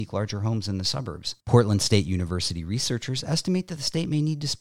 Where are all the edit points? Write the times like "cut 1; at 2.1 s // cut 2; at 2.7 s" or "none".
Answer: cut 1; at 1.4 s

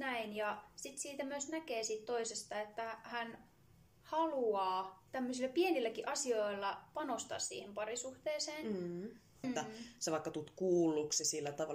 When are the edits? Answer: cut 1; at 5.1 s // cut 2; at 9.4 s

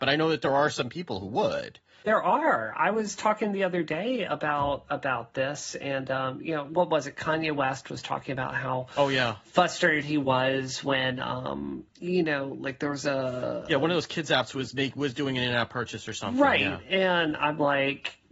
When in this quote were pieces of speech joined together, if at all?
none

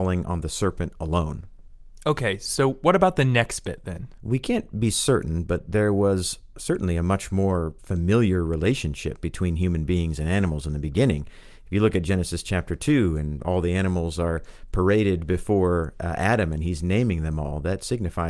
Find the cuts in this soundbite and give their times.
cut 1; at 4.2 s

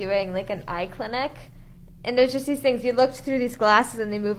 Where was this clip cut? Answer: none

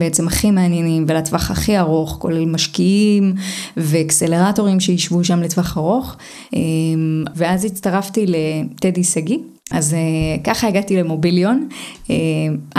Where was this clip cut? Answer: cut 1; at 7.3 s // cut 2; at 9.7 s

